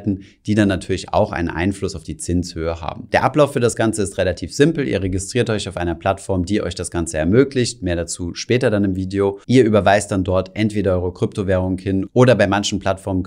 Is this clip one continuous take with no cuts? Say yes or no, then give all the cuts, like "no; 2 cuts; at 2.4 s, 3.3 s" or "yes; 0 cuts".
no; 1 cut; at 9.4 s